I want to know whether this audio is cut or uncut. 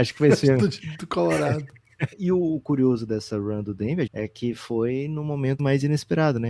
cut